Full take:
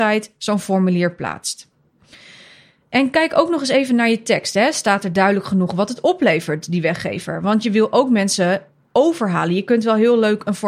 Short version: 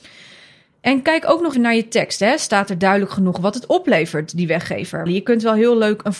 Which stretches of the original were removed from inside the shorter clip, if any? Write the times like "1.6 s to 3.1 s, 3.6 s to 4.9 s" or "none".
3.6 s to 3.9 s, 7.4 s to 9.5 s